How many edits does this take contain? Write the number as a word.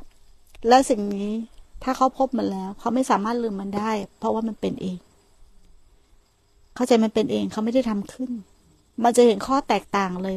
zero